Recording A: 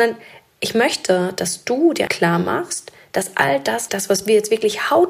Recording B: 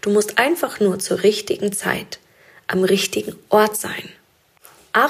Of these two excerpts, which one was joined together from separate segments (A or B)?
A